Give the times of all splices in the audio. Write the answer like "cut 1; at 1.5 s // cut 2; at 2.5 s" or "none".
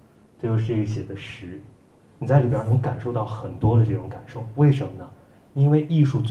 cut 1; at 2.0 s